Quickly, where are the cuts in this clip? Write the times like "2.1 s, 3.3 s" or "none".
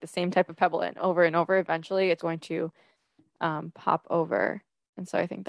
2.2 s